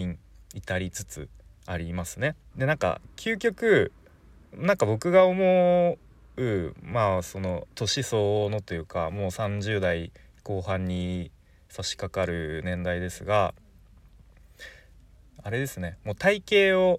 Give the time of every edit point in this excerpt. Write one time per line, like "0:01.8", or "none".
0:02.5